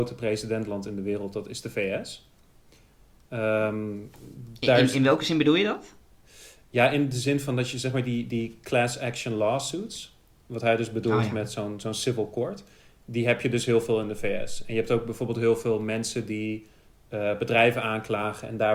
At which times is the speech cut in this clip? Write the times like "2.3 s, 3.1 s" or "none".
none